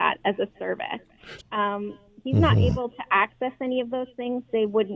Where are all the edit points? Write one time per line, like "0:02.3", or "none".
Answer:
0:01.4